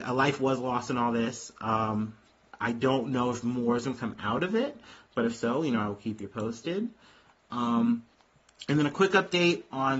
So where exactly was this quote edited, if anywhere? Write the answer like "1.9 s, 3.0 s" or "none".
none